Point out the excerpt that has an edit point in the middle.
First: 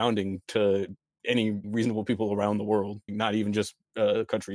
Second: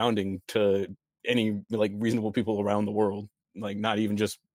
first; 2 cuts; at 1.6 s, 3.1 s

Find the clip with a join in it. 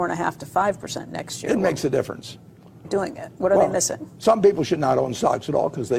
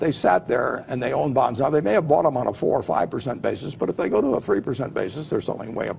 first; 1 cut; at 2.8 s

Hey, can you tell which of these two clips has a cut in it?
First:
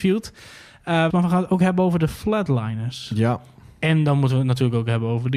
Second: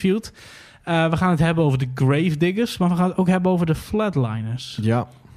first; 1 cut; at 1.1 s

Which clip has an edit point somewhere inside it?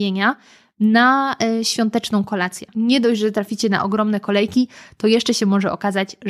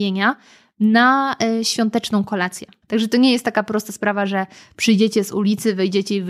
first; 1 cut; at 2.7 s

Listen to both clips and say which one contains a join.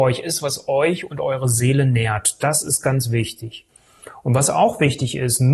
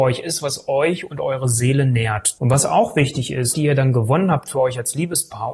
second; 2 cuts; at 2.4 s, 3.5 s

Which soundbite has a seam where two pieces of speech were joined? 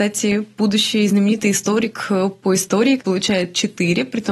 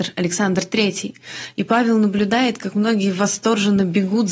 first; 1 cut; at 3.0 s

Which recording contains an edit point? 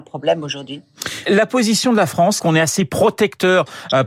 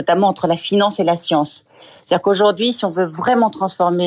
first; 2 cuts; at 1.3 s, 2.4 s

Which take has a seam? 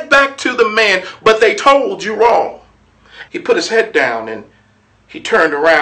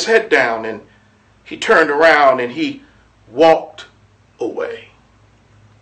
first; 2 cuts; at 1.2 s, 3.3 s

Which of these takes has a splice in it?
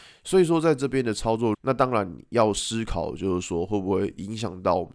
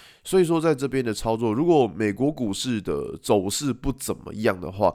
first; 1 cut; at 1.5 s

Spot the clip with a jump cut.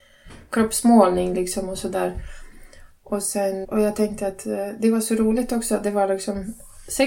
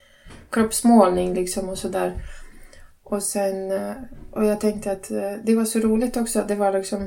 first; 1 cut; at 3.6 s

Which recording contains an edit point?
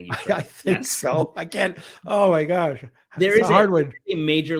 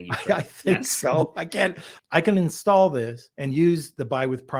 second; 2 cuts; at 2.0 s, 3.3 s

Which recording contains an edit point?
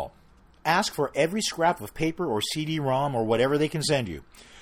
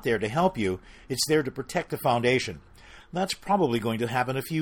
second; 1 cut; at 3.0 s

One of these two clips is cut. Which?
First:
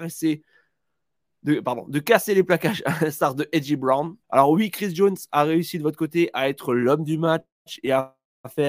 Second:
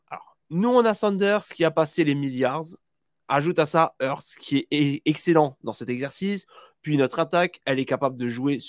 first; 1 cut; at 4.2 s

